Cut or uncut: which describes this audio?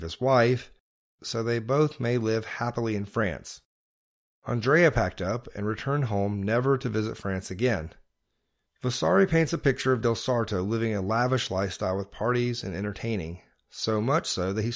uncut